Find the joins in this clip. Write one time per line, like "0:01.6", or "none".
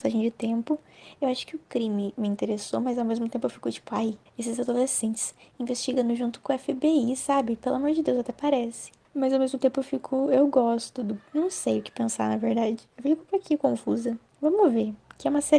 none